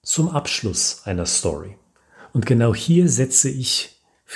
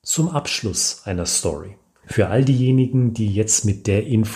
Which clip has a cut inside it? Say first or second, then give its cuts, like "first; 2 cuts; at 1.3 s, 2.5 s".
second; 1 cut; at 2.0 s